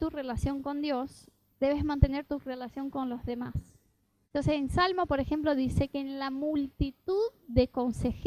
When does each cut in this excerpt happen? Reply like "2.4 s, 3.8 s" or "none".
none